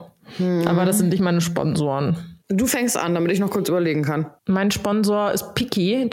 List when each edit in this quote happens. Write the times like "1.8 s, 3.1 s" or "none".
2.4 s, 4.4 s